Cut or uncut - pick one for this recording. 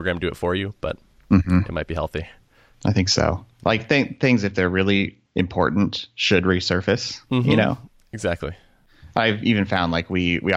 uncut